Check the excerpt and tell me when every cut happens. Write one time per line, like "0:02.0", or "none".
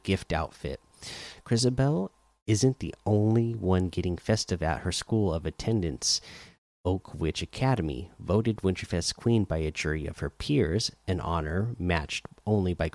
none